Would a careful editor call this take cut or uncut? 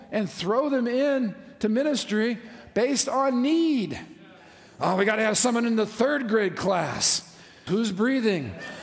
cut